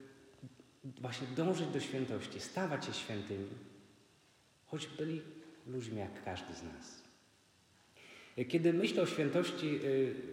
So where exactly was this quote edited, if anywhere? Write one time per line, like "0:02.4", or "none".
none